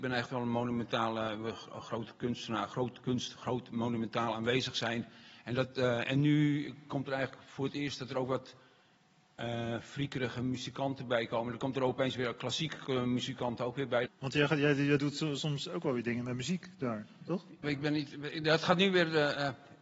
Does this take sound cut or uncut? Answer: cut